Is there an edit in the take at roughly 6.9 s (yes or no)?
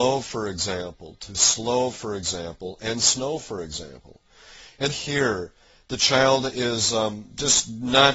no